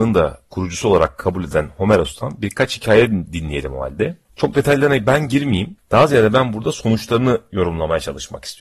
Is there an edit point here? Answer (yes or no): yes